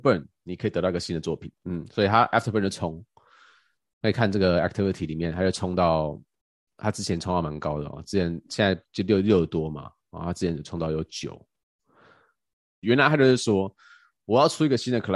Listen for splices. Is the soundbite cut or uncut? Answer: cut